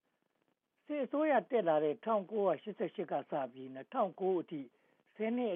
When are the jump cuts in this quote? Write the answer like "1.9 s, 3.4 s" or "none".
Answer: none